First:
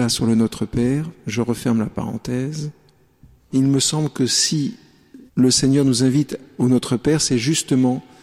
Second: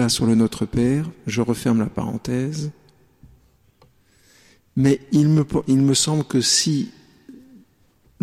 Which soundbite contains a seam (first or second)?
first